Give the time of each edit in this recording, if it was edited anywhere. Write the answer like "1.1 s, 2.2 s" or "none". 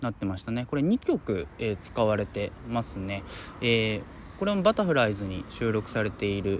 none